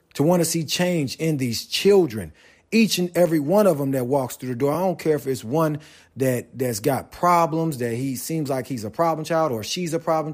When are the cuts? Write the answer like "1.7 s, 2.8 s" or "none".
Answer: none